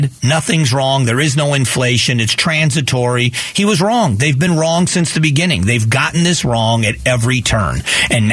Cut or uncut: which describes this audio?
uncut